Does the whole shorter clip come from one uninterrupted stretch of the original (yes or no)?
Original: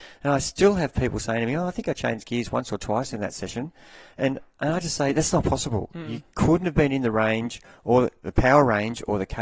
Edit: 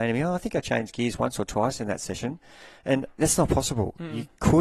no